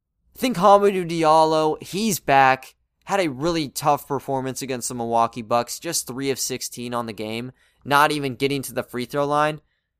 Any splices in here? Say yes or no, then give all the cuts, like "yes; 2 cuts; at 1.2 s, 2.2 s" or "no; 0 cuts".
no; 0 cuts